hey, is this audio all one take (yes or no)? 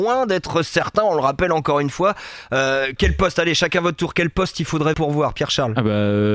no